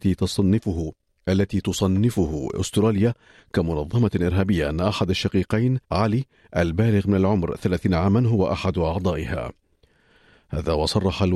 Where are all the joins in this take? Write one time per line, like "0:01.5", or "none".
0:05.8